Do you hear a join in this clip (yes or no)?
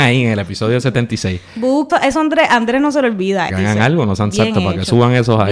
yes